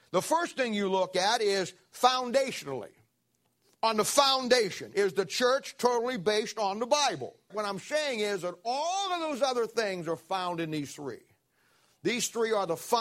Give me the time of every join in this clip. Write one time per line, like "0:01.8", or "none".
0:07.5